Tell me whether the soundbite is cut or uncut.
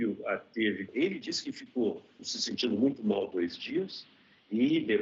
cut